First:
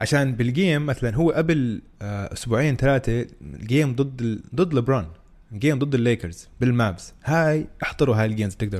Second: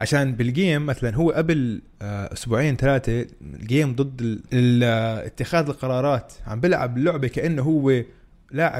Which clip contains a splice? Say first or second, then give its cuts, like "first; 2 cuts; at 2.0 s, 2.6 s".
second; 1 cut; at 4.5 s